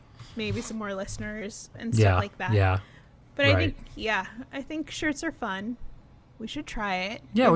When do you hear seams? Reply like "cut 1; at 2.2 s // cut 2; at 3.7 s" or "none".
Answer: none